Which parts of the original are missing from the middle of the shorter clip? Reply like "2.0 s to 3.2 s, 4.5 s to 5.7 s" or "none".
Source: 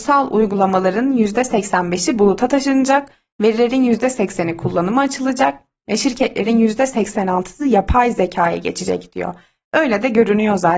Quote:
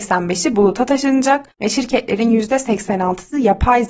3.1 s to 5.8 s